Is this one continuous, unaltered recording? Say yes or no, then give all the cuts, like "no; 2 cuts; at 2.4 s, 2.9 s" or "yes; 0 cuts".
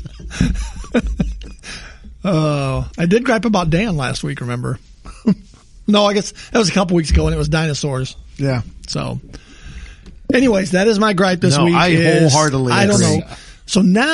no; 1 cut; at 13.2 s